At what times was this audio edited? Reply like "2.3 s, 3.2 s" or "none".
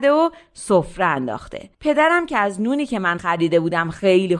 1.7 s